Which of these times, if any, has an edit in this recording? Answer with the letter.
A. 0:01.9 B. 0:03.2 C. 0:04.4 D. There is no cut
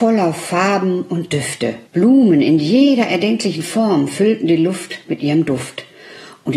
A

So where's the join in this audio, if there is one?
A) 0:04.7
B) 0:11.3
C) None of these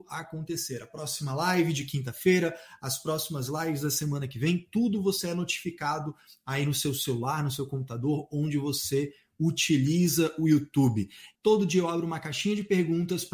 B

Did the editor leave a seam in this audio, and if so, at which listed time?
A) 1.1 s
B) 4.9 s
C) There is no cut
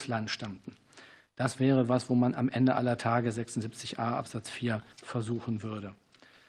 B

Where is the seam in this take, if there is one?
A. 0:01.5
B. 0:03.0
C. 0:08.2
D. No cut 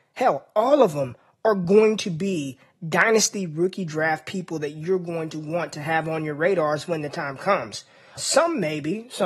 C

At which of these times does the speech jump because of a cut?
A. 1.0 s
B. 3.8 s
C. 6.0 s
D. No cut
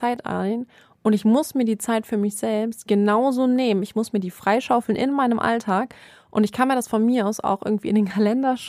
D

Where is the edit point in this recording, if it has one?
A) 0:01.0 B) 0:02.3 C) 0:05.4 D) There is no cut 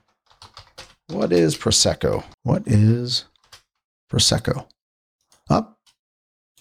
B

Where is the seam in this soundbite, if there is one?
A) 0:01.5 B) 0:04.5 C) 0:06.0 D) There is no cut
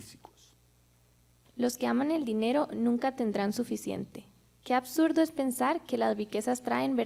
A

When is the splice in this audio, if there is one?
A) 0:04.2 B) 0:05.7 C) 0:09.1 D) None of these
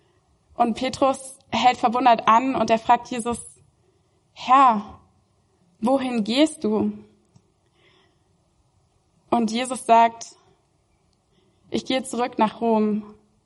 D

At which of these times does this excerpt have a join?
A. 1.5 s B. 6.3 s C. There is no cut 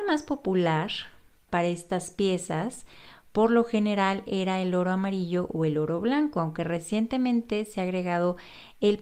A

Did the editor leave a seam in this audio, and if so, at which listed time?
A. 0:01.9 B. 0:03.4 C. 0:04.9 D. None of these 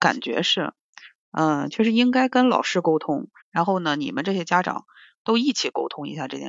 B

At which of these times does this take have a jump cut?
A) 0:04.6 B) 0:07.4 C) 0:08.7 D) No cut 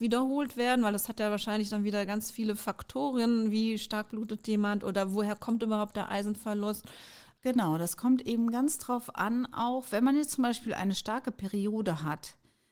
B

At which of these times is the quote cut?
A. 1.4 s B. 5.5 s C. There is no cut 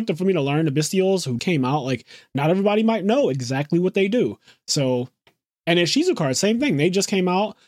A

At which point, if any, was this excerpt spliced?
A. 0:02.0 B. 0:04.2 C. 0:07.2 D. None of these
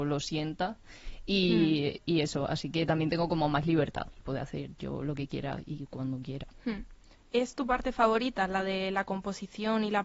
B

